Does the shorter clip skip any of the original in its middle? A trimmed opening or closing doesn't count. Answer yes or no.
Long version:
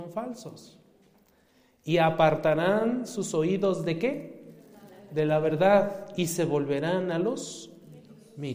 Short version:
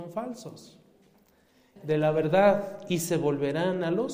yes